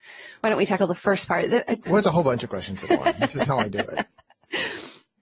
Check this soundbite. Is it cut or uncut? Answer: cut